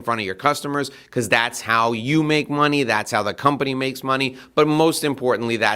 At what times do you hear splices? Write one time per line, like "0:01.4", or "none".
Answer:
none